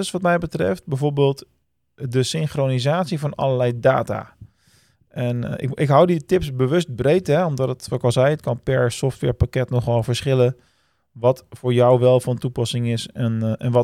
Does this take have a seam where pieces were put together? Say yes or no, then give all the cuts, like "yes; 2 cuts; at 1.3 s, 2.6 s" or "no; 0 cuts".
no; 0 cuts